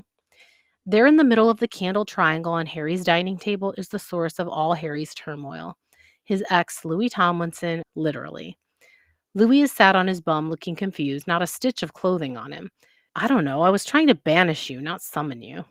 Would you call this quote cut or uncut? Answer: cut